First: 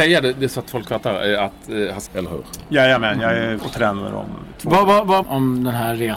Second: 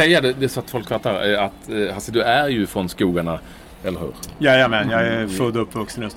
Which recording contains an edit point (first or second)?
first